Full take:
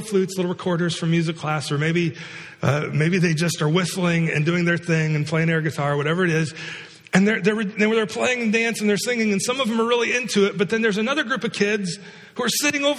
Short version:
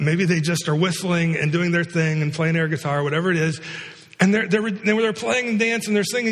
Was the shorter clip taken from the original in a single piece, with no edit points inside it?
yes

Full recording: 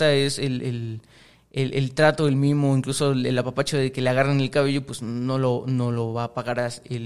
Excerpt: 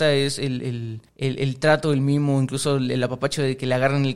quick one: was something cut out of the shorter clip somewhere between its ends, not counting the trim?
yes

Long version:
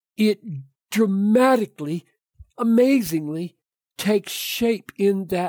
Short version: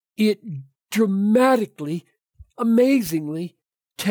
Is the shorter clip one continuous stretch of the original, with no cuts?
yes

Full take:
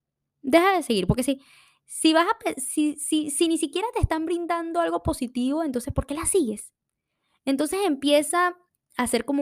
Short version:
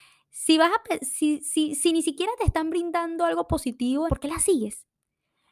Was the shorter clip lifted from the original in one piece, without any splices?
no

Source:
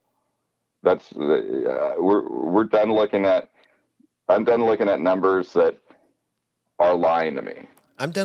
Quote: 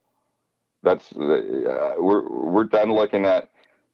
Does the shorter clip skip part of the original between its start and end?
no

